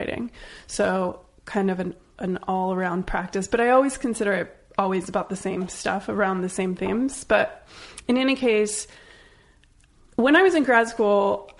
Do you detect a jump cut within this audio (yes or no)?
no